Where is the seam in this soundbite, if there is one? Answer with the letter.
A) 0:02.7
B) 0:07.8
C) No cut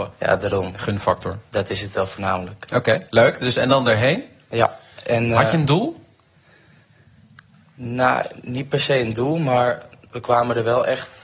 C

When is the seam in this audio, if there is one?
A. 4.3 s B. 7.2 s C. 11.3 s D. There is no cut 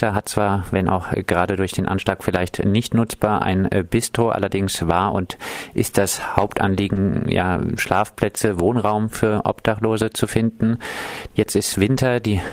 C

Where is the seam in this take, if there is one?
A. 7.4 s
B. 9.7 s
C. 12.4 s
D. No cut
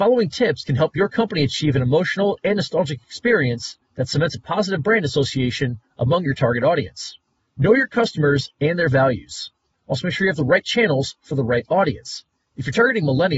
B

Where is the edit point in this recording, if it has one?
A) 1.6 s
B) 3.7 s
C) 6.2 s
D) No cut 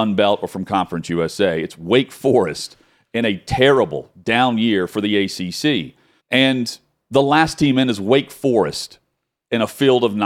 C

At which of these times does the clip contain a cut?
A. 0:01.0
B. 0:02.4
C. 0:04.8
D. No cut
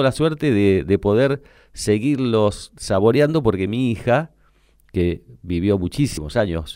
D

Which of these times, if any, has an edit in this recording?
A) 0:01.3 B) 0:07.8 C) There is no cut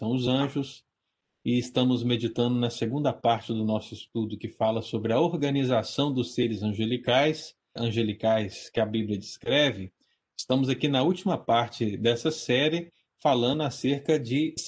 B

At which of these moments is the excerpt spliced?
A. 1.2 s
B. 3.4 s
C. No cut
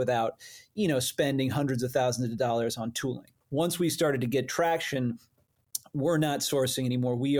B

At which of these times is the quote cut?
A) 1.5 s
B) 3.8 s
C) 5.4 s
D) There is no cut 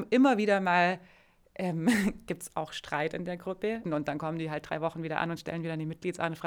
B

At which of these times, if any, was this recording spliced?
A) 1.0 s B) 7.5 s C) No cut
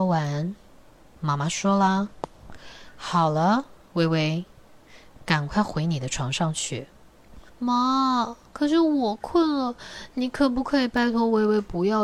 B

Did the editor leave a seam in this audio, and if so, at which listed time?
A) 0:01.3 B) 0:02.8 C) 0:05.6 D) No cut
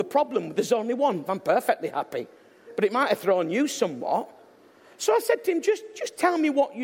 A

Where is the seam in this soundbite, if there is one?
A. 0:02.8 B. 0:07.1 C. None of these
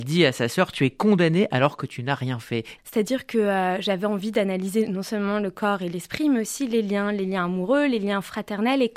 A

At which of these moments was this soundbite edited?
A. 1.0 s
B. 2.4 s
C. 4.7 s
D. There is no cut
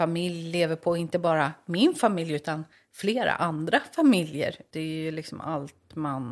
C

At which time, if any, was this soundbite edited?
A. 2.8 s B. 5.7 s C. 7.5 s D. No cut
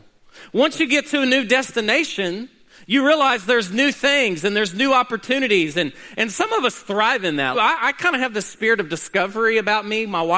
C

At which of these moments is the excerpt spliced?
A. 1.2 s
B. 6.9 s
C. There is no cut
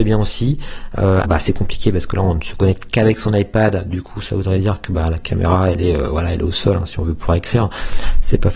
A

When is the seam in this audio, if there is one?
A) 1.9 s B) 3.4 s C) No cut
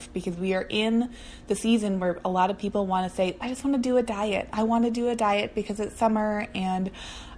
B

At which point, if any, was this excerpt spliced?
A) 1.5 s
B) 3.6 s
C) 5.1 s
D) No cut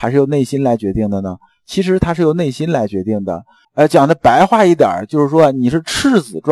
B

